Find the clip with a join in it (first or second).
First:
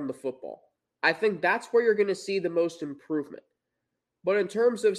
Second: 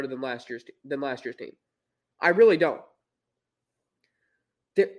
first